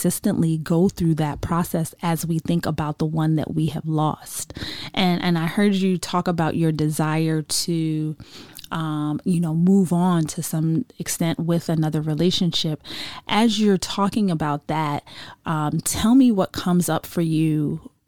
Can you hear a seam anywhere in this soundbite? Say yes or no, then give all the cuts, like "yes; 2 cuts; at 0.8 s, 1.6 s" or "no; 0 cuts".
no; 0 cuts